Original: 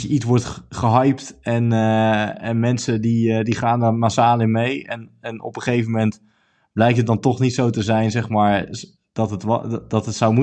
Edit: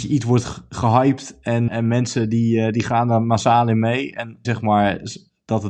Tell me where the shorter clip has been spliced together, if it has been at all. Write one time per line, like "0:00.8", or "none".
0:01.7
0:04.4